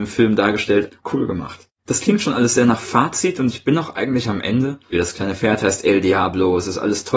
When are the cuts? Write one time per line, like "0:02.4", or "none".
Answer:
0:01.0
0:04.9